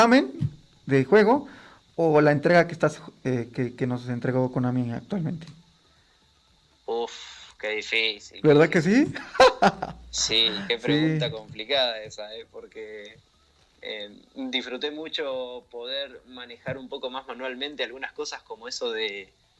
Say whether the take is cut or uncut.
uncut